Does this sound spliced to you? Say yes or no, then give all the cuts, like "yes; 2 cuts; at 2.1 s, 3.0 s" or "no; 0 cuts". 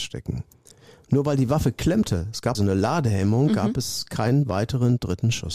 yes; 1 cut; at 2.5 s